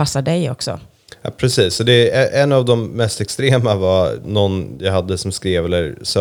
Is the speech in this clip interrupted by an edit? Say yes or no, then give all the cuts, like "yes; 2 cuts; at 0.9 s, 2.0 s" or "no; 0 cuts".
yes; 1 cut; at 4.2 s